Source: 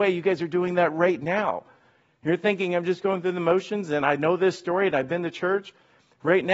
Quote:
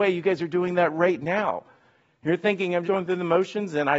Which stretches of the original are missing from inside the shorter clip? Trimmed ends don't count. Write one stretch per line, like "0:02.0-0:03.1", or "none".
0:02.8-0:03.0